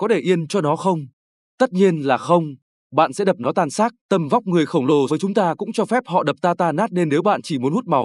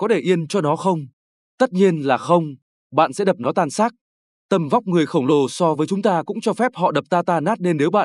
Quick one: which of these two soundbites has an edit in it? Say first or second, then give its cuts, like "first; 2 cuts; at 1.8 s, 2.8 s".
first; 2 cuts; at 4.0 s, 5.1 s